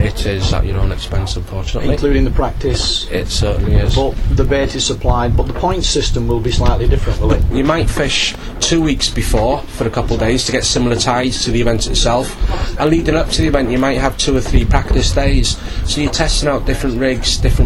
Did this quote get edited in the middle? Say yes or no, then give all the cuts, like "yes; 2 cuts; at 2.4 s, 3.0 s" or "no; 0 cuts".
yes; 1 cut; at 7.5 s